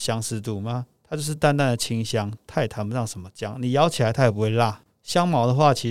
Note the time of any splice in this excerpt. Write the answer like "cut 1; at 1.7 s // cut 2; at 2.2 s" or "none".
none